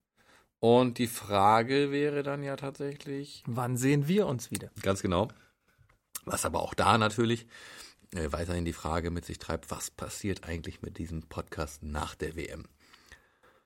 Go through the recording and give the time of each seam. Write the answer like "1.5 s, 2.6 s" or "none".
3.4 s, 4.7 s